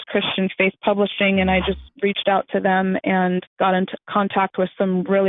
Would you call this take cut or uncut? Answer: uncut